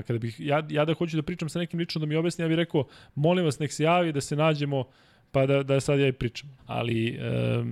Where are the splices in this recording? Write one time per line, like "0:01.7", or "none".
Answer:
0:06.6